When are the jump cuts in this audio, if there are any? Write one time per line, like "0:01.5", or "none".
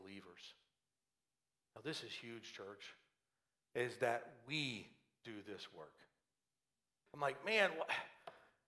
0:07.1